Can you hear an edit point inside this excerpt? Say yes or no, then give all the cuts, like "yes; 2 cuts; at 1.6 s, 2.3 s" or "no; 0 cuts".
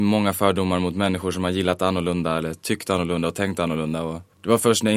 no; 0 cuts